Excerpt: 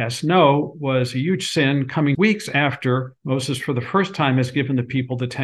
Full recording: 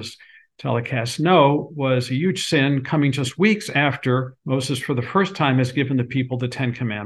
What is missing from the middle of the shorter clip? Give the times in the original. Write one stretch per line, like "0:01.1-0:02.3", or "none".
0:03.1-0:03.4